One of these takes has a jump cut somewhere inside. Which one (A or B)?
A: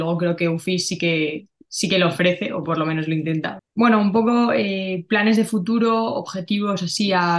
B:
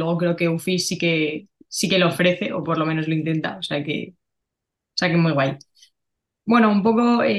A